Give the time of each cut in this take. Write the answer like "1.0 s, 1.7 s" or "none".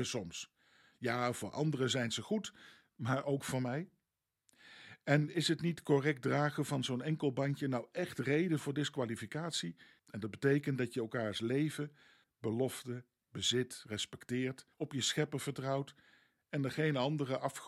10.0 s, 12.2 s, 14.7 s